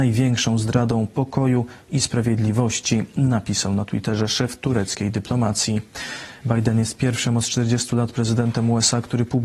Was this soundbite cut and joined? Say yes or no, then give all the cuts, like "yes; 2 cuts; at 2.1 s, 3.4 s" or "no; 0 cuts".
yes; 1 cut; at 6.4 s